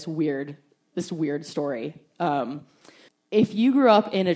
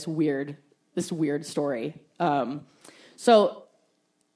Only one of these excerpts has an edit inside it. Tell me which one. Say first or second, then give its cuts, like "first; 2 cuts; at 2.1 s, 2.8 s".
first; 1 cut; at 3.1 s